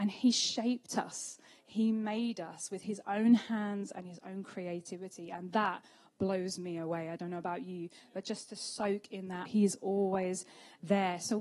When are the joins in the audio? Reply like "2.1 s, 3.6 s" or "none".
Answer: 9.4 s